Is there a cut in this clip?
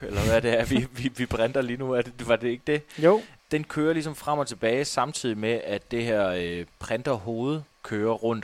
no; 0 cuts

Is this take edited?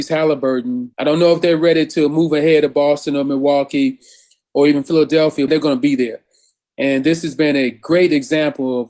yes; 2 cuts; at 0.9 s, 5.5 s

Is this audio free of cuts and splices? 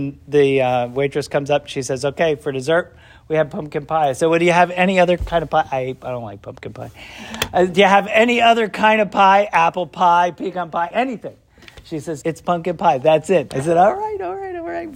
no; 3 cuts; at 10.9 s, 12.2 s, 13.5 s

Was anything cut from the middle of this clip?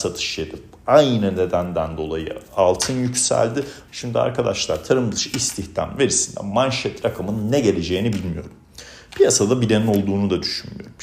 yes; 1 cut; at 3.9 s

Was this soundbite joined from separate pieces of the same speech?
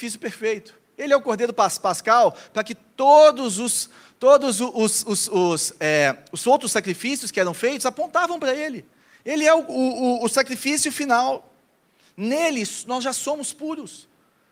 no; 0 cuts

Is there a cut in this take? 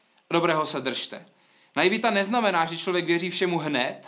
no; 0 cuts

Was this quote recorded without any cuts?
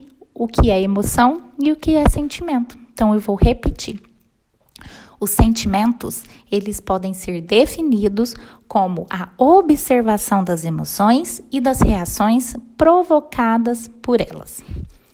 yes; 0 cuts

